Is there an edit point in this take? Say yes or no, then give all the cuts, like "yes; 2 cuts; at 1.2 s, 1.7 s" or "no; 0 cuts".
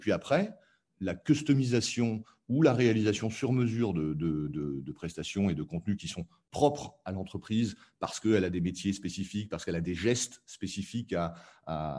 no; 0 cuts